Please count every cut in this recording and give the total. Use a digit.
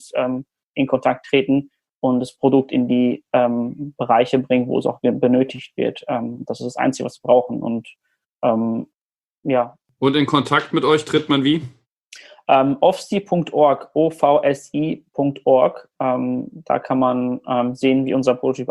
0